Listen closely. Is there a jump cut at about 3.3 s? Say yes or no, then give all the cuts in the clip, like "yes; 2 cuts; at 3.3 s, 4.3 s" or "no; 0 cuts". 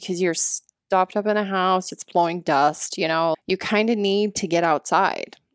yes; 2 cuts; at 1.9 s, 3.3 s